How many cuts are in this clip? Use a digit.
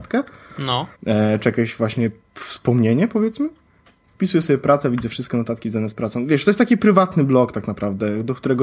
1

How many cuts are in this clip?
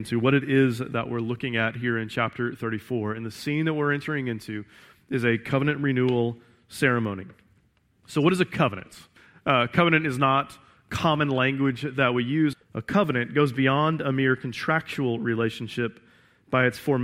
1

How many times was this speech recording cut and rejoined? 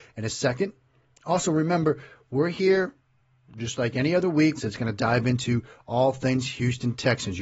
1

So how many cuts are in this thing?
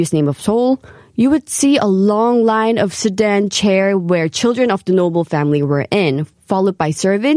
0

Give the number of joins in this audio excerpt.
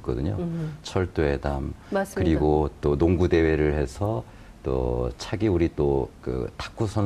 1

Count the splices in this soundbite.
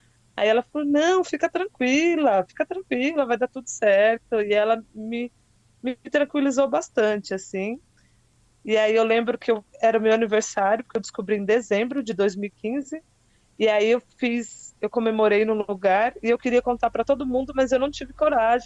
0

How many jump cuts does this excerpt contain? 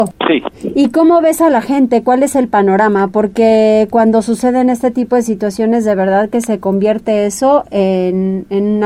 0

